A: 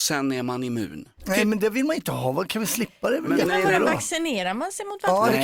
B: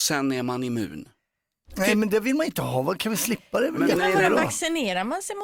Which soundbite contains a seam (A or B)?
A